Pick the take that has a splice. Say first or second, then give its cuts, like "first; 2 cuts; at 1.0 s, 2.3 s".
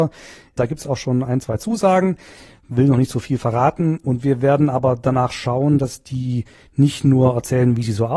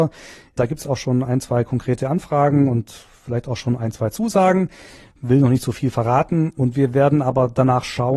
first; 1 cut; at 1.4 s